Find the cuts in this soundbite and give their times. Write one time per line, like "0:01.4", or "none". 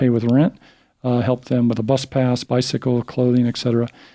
none